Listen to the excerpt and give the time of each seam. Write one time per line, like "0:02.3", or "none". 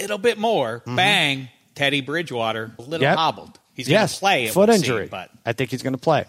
0:02.8